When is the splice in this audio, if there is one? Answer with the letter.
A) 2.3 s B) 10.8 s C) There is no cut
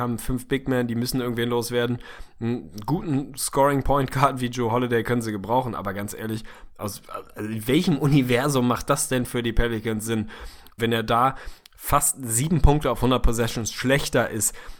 B